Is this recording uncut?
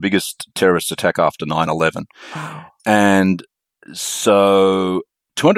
yes; 0 cuts

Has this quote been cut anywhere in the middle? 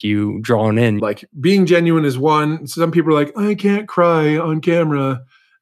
yes; 1 cut; at 1.0 s

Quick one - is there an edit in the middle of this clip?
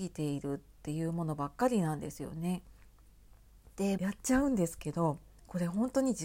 yes; 1 cut; at 4.0 s

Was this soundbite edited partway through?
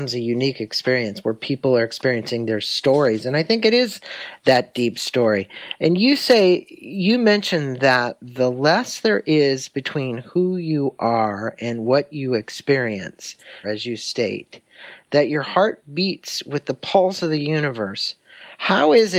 yes; 1 cut; at 13.6 s

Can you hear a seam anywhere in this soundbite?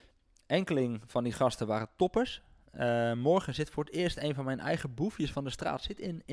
no; 0 cuts

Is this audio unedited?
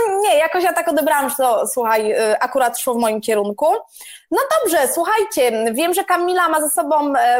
yes; 0 cuts

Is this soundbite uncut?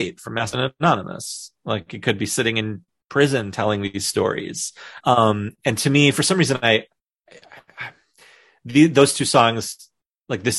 no; 1 cut; at 5.0 s

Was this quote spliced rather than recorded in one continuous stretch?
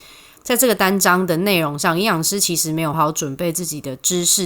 yes; 1 cut; at 2.9 s

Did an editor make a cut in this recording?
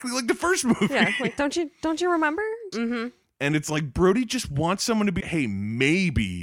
yes; 2 cuts; at 2.7 s, 5.2 s

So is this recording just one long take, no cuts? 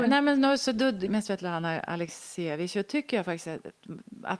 no; 1 cut; at 1.1 s

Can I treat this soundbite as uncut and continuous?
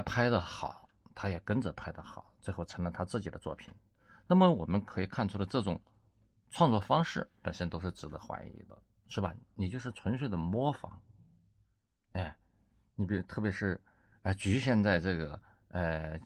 yes; 0 cuts

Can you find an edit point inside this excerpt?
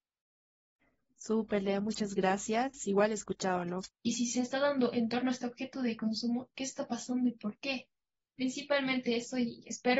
yes; 1 cut; at 3.9 s

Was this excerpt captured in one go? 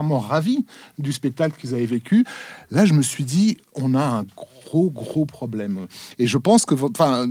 yes; 0 cuts

